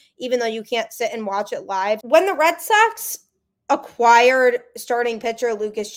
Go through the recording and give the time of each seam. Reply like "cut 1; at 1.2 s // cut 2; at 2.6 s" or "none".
cut 1; at 2.0 s